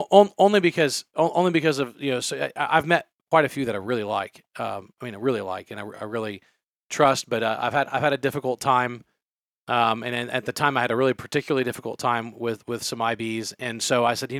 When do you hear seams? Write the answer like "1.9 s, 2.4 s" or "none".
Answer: none